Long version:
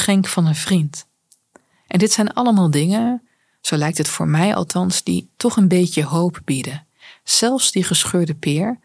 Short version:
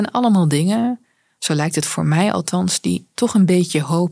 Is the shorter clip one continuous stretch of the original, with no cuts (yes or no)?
yes